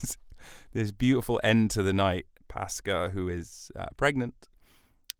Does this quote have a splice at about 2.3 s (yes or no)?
yes